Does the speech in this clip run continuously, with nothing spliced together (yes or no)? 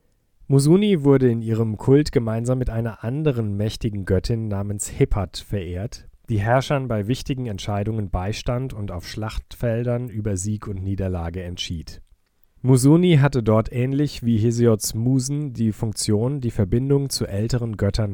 no